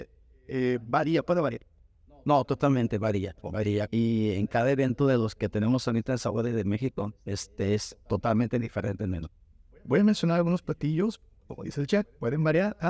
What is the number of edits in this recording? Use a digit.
1